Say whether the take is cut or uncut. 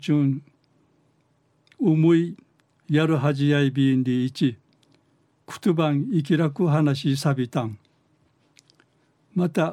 uncut